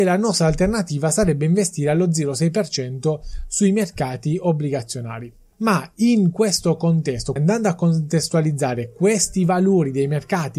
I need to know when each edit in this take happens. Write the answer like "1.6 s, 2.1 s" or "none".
5.5 s, 7.4 s